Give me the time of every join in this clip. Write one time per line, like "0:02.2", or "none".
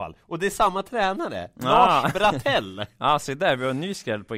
none